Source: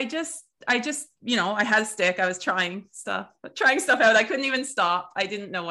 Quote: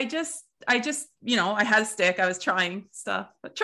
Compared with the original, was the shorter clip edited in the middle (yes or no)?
no